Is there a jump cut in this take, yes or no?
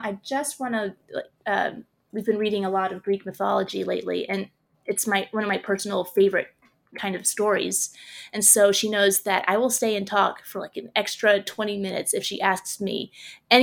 yes